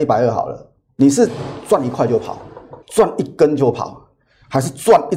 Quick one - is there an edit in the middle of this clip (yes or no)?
yes